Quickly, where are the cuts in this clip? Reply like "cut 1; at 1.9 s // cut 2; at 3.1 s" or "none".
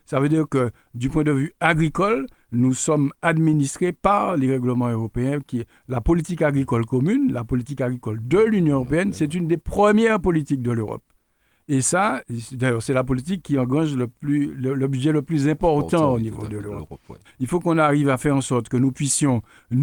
cut 1; at 17.2 s